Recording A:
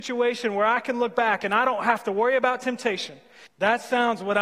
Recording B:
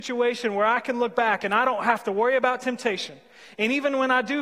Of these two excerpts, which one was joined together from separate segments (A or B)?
A